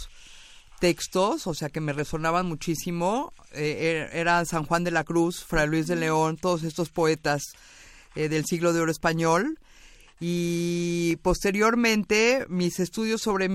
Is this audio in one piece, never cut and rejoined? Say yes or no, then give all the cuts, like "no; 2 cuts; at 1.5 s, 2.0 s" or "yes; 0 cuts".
yes; 0 cuts